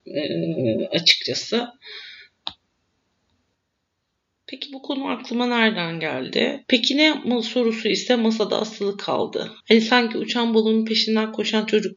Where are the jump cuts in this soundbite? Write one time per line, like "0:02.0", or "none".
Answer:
0:06.6
0:09.6